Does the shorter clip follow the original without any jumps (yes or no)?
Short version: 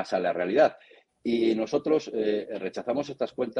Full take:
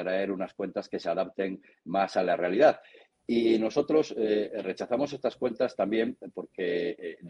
yes